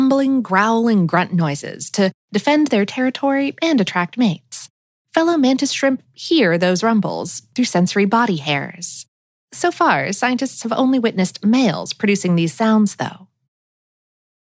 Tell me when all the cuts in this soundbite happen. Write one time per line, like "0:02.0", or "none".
0:05.0